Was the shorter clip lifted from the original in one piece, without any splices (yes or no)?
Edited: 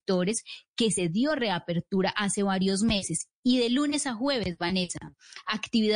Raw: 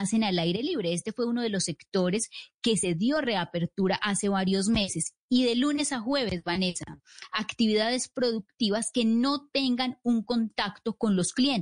yes